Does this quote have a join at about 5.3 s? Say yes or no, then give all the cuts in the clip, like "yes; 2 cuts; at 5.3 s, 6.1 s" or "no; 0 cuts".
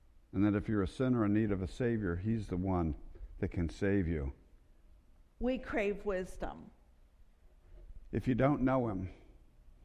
yes; 2 cuts; at 5.3 s, 8.0 s